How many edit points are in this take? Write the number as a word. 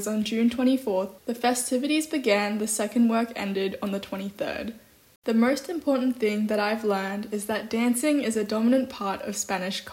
one